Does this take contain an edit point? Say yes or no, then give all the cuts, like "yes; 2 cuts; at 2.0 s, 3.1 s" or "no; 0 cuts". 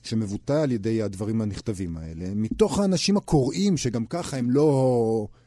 no; 0 cuts